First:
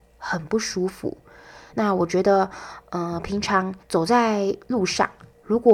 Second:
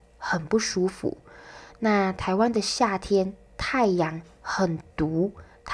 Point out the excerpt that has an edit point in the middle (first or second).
first